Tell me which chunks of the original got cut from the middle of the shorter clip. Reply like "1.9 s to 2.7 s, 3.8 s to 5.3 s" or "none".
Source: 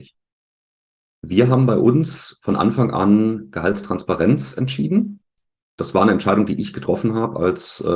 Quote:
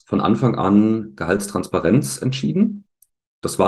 none